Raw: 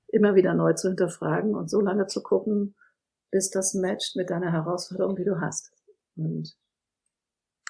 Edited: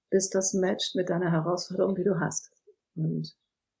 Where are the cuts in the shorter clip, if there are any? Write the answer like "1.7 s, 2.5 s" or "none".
none